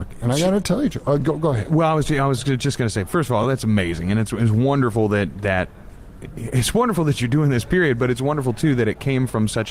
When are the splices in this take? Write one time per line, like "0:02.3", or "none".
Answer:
none

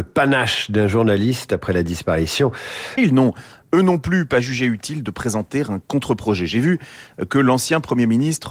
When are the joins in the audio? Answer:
0:03.0

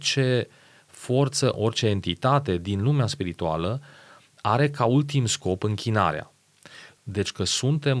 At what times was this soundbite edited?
0:01.5
0:07.0

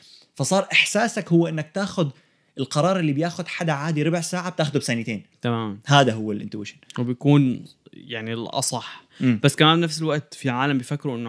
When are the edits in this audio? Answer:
none

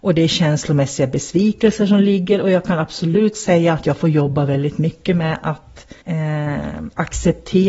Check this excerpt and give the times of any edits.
0:06.0

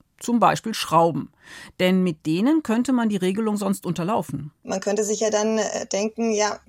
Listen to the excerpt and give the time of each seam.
none

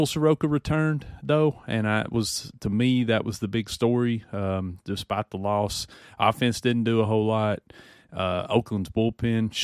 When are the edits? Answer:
none

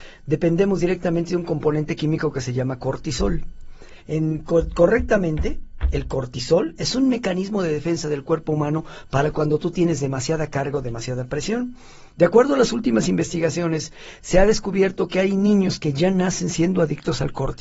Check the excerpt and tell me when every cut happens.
0:04.0

